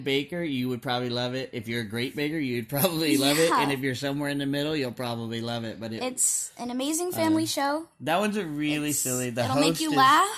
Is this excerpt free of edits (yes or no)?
yes